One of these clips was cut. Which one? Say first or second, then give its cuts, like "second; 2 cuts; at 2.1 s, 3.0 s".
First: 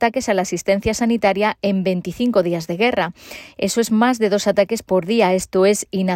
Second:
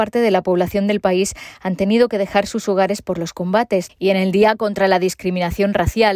second; 1 cut; at 3.9 s